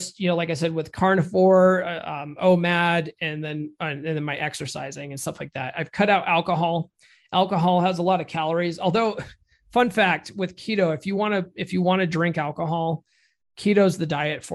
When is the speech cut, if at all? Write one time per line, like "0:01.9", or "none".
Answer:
0:13.4